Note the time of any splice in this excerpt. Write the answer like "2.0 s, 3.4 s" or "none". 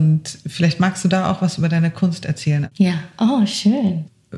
2.7 s